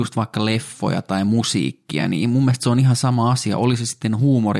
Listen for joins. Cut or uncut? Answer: uncut